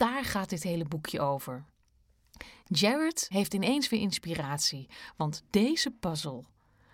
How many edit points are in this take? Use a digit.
1